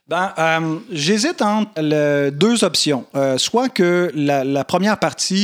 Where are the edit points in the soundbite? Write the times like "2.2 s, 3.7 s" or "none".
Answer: 1.8 s